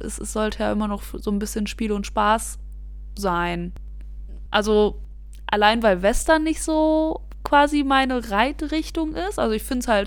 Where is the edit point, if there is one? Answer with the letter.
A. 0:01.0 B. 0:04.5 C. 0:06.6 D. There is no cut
B